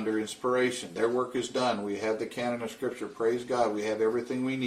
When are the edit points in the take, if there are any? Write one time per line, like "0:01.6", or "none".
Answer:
none